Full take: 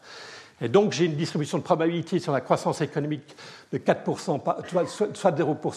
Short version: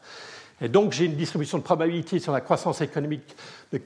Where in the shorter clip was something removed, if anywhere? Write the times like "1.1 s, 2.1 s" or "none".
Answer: none